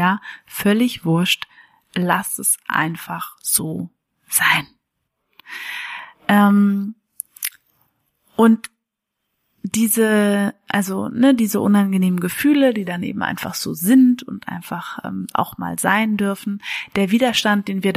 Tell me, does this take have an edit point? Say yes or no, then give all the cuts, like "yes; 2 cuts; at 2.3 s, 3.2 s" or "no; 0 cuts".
no; 0 cuts